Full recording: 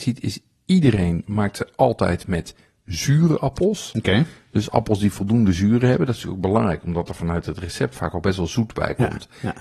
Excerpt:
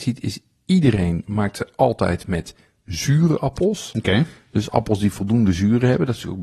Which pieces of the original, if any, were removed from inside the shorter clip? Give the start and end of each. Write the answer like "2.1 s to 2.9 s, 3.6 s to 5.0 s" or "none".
none